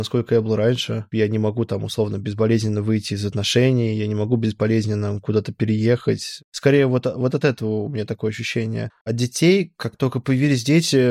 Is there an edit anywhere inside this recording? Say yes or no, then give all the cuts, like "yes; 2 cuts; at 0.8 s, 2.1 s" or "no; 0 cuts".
no; 0 cuts